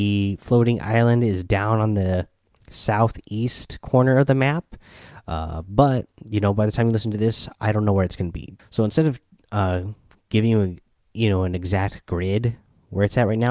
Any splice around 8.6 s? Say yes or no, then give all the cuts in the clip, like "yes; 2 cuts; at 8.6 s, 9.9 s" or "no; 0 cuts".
yes; 1 cut; at 8.6 s